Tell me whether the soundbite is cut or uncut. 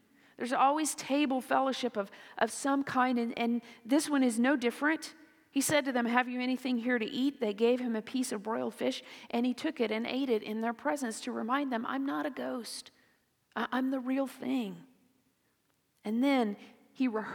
uncut